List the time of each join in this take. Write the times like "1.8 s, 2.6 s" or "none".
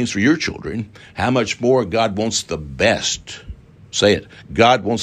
none